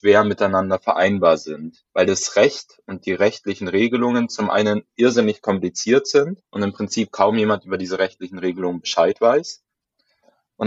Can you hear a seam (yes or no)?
yes